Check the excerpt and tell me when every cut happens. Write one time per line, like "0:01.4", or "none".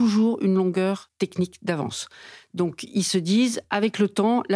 none